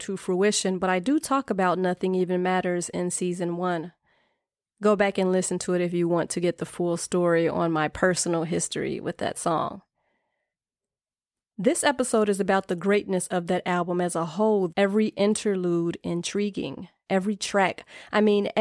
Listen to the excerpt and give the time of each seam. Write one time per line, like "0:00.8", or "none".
0:14.7